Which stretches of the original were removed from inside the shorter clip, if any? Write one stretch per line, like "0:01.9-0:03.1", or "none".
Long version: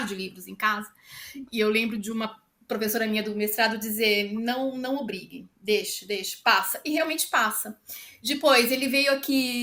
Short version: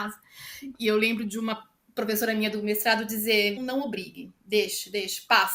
0:04.3-0:04.7